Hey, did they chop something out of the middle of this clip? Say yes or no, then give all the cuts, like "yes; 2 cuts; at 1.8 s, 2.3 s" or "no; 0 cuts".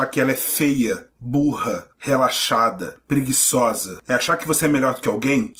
no; 0 cuts